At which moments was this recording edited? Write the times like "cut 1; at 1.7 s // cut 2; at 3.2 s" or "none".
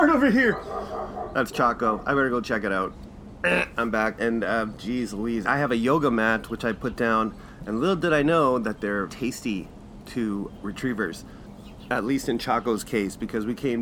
cut 1; at 4.2 s // cut 2; at 5.4 s // cut 3; at 9.1 s